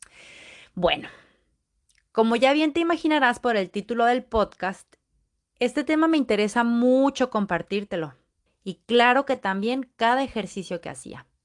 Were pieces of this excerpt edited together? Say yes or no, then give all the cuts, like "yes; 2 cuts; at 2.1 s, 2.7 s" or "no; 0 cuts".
yes; 1 cut; at 8.5 s